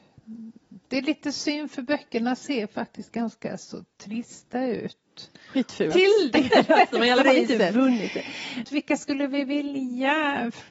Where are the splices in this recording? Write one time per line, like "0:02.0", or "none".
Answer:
0:05.9
0:08.7